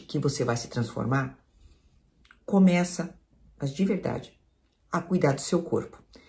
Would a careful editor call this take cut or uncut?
uncut